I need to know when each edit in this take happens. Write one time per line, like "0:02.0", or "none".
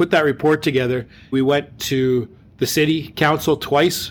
0:01.3